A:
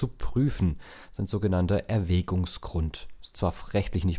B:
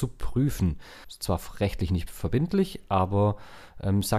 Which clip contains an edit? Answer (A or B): B